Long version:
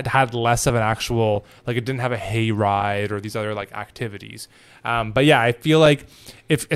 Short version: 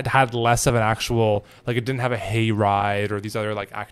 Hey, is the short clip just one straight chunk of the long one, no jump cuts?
yes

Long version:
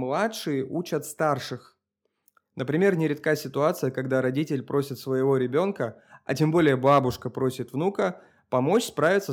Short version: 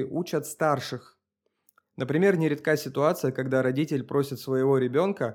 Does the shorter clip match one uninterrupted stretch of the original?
yes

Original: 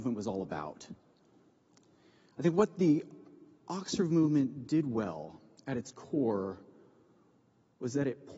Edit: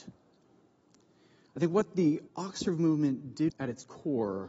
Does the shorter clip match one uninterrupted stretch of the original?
no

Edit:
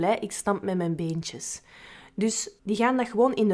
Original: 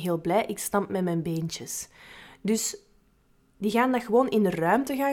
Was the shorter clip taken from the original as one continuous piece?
no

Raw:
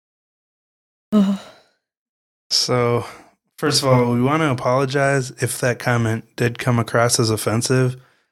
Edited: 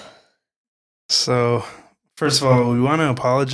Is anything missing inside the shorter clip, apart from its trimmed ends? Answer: no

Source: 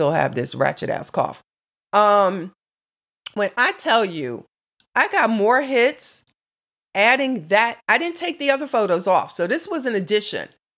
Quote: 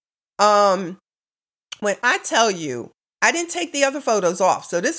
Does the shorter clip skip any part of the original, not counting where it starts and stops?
yes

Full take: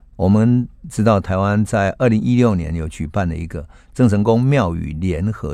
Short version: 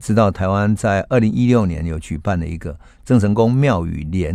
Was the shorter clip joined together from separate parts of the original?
no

